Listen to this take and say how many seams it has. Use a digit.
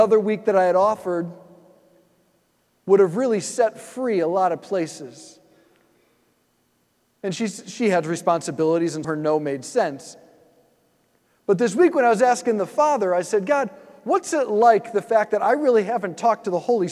1